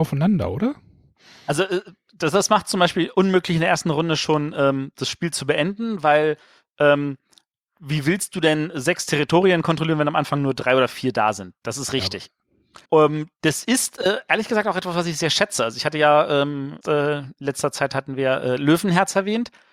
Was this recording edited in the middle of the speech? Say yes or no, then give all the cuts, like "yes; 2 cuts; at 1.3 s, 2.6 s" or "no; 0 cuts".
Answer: yes; 2 cuts; at 12.8 s, 16.8 s